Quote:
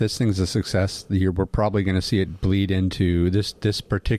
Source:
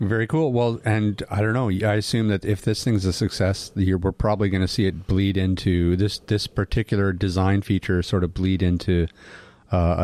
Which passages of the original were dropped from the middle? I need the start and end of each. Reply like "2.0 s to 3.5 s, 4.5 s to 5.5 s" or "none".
none